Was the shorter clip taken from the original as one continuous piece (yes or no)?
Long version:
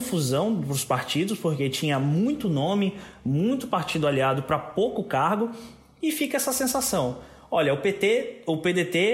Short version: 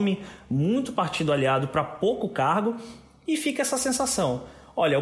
yes